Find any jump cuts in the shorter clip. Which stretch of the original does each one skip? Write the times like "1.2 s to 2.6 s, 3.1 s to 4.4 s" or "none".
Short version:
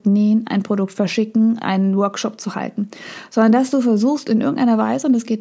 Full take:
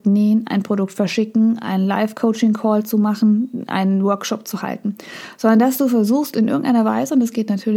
1.6 s to 3.7 s